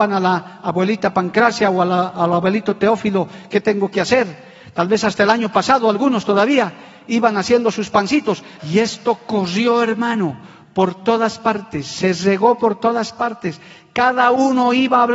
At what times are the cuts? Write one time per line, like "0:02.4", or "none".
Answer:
0:08.6